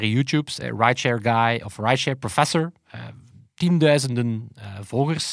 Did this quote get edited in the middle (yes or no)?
no